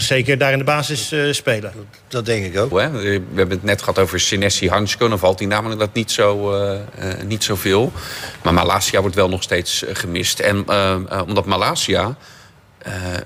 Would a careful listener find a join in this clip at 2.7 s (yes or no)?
yes